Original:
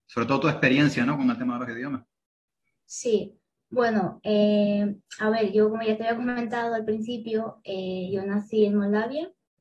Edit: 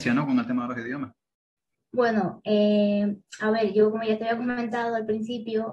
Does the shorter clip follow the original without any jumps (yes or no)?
no